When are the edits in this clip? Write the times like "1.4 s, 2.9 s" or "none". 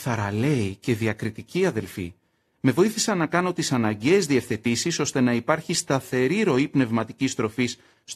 none